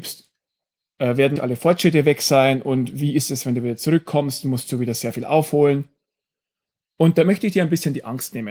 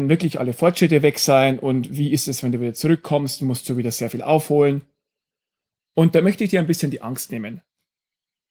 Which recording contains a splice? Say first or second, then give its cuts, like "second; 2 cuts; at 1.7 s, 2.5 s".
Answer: first; 1 cut; at 1.4 s